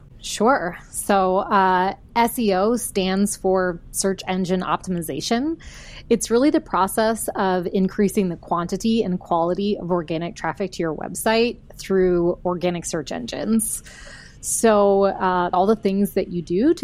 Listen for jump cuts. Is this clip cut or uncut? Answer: cut